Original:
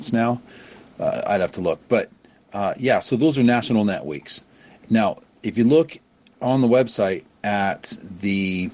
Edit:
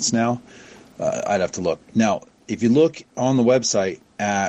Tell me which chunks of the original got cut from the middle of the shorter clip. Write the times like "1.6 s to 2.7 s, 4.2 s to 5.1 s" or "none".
1.8 s to 4.8 s, 6.0 s to 6.3 s